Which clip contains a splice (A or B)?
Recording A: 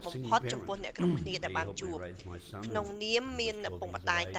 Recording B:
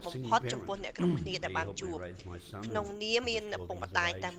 B